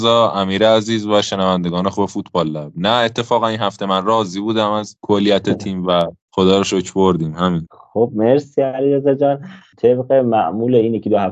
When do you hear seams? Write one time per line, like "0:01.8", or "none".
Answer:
0:06.2